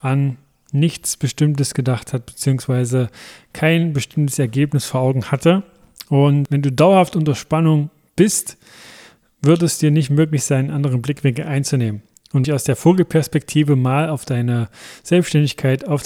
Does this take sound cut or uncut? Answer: cut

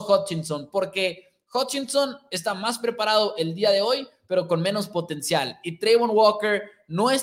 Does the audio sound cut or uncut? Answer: uncut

